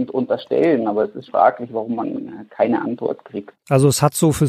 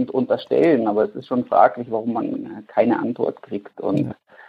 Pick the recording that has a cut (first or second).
first